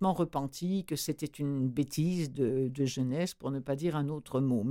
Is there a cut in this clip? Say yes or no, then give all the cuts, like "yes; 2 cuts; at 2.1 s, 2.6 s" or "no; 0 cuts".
no; 0 cuts